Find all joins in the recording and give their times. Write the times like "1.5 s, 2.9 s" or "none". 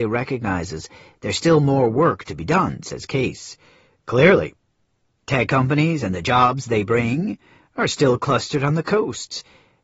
none